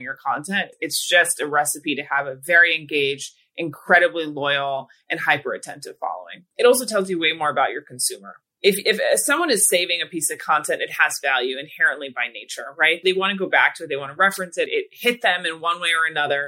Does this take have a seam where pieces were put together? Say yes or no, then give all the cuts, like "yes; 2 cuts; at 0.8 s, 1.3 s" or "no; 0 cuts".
no; 0 cuts